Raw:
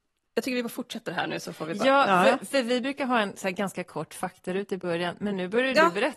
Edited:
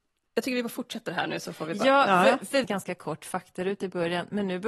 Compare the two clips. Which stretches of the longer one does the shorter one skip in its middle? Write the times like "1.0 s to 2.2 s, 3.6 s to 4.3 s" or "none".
2.6 s to 3.5 s